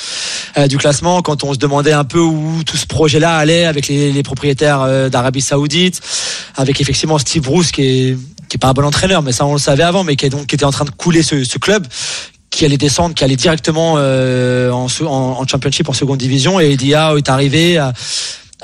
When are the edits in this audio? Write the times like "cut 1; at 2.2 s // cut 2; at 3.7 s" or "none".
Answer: none